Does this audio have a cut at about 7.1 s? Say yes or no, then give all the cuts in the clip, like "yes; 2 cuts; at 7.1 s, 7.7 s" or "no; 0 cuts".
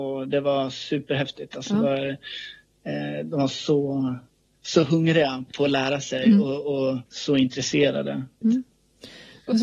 yes; 2 cuts; at 7.1 s, 8.4 s